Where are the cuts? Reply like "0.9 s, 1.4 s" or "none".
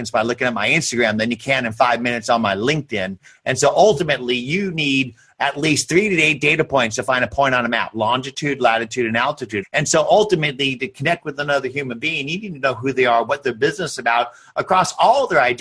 9.6 s